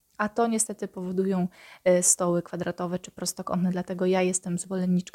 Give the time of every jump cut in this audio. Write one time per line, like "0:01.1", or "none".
none

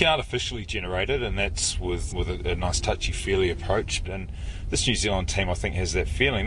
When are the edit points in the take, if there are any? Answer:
0:02.1
0:04.0

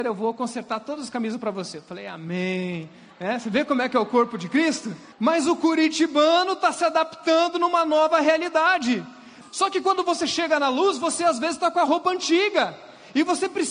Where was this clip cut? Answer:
0:05.1
0:09.4

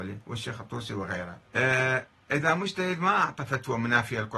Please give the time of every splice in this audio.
0:01.5

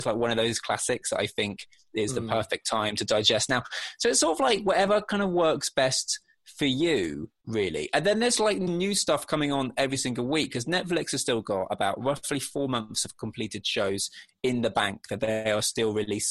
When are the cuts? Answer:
0:08.7

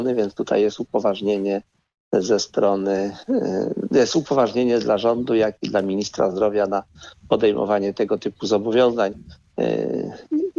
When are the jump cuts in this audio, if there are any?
none

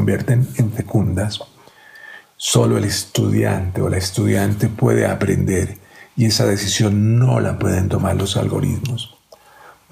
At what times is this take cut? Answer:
0:02.2

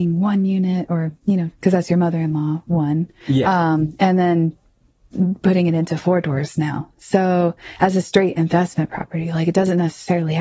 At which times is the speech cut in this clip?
0:01.5

